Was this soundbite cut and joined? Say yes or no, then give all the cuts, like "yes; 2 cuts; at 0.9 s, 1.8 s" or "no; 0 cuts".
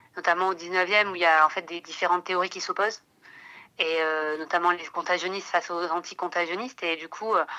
no; 0 cuts